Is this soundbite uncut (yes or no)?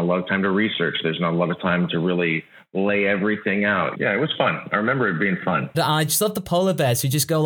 no